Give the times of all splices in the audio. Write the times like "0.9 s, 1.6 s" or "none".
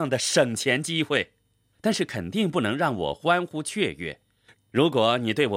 1.7 s, 4.5 s